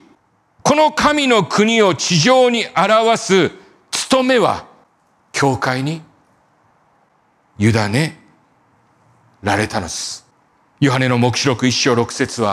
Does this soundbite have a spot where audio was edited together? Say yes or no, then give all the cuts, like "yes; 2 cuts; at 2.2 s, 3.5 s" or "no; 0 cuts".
no; 0 cuts